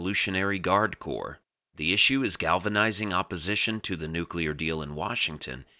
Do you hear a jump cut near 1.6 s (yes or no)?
yes